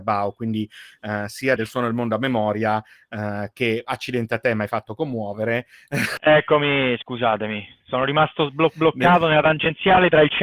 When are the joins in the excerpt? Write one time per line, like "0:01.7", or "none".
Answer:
0:01.6
0:06.2